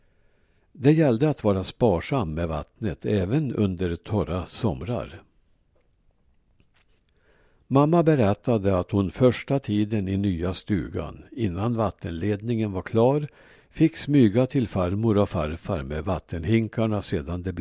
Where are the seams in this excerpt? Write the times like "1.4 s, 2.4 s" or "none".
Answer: none